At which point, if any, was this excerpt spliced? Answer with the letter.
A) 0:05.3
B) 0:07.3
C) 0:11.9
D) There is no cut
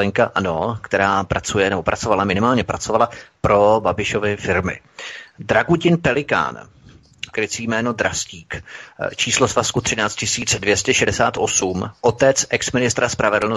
B